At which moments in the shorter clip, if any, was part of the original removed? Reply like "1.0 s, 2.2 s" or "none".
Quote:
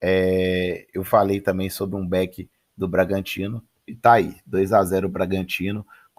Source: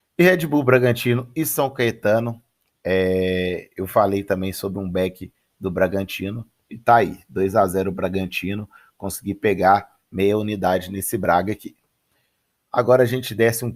none